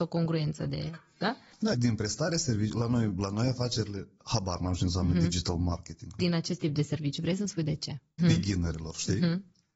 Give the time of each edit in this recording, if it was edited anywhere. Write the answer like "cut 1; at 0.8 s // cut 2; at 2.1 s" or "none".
cut 1; at 1.7 s // cut 2; at 6.2 s // cut 3; at 8.2 s